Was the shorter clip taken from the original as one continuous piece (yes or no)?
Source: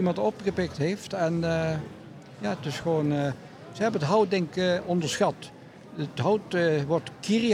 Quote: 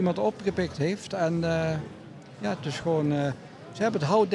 yes